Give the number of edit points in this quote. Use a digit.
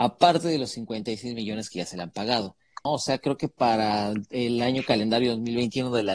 1